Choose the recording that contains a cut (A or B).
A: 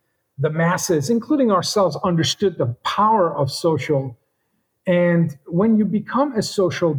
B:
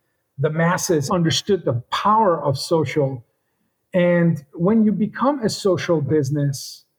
B